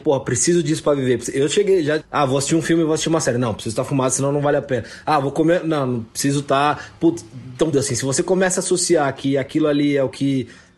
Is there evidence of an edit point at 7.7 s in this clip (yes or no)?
yes